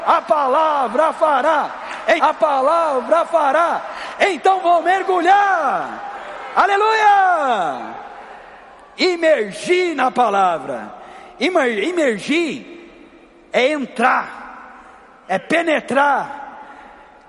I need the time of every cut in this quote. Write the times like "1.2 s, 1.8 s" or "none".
2.2 s